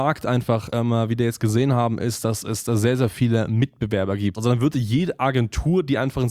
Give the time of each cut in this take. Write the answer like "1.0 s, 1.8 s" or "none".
4.3 s